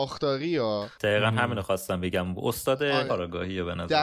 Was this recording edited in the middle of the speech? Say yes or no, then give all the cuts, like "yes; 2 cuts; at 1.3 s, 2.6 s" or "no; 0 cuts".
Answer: yes; 1 cut; at 3.1 s